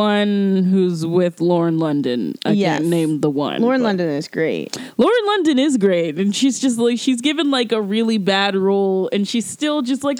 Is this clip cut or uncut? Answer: uncut